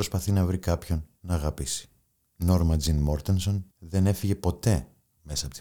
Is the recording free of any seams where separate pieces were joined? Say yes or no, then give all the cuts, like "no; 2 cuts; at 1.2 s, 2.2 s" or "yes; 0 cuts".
no; 2 cuts; at 2.2 s, 3.7 s